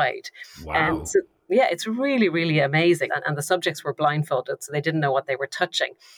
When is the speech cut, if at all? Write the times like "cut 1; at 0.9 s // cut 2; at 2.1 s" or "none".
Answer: cut 1; at 3.1 s